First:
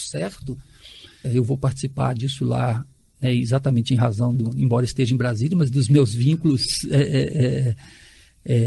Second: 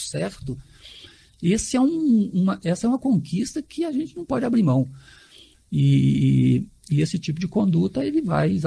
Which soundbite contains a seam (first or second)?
first